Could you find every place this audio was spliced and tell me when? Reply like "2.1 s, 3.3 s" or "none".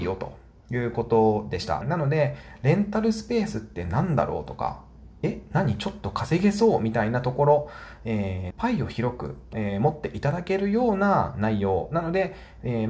1.8 s, 8.5 s, 9.5 s

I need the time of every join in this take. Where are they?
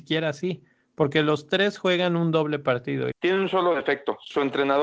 3.1 s

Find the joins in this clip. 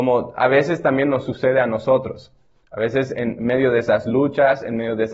none

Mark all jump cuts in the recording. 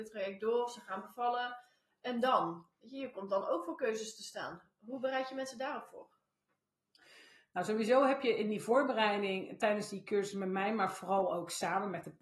none

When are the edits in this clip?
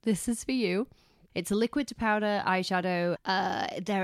1.3 s, 3.1 s

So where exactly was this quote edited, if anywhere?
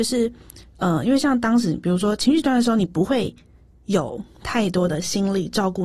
none

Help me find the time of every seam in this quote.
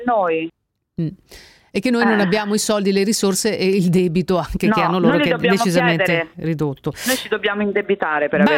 none

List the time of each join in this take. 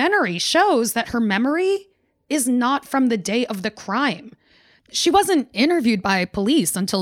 none

